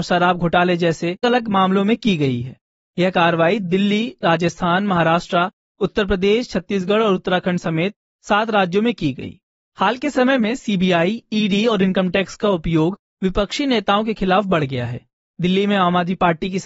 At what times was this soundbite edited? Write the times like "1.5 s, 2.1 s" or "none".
1.2 s